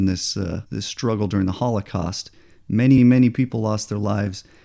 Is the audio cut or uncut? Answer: cut